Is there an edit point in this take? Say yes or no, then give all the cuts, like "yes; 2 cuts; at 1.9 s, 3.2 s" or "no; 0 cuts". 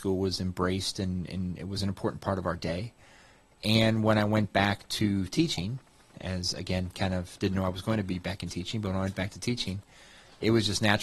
no; 0 cuts